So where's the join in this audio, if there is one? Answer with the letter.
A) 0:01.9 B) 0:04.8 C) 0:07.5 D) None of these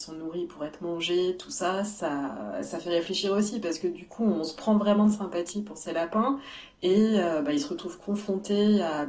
D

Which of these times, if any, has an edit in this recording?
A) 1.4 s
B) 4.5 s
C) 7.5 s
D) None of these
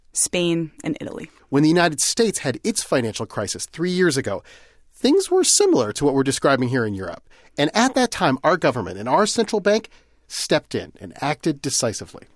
A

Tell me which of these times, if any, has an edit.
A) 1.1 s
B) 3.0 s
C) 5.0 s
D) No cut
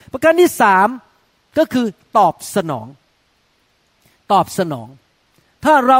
D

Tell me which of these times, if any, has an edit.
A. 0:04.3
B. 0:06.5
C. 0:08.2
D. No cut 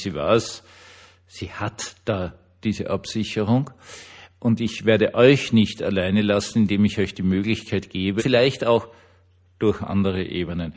C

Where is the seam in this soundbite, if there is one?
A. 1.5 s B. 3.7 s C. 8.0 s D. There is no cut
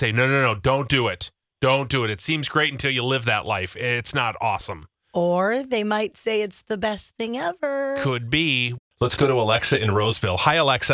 D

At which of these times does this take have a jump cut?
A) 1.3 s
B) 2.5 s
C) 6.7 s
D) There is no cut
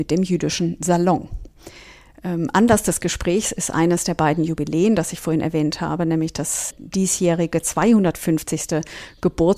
C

